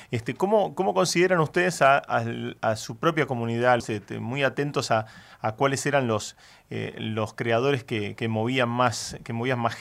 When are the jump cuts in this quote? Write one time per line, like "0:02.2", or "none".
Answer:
0:03.8